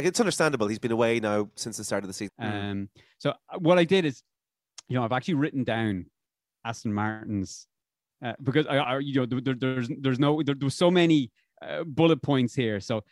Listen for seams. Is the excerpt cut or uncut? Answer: cut